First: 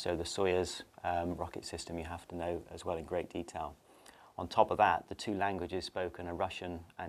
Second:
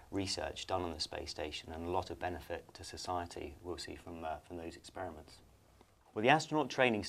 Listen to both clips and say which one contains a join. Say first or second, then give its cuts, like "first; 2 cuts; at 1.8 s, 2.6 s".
second; 1 cut; at 6.1 s